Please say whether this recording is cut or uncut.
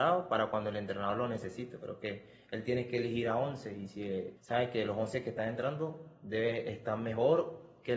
cut